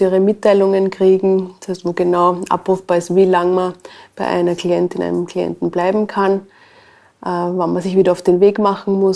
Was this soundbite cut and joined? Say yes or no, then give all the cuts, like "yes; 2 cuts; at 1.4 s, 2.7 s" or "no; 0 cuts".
no; 0 cuts